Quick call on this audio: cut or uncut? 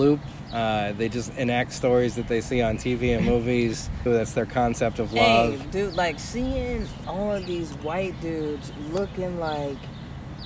cut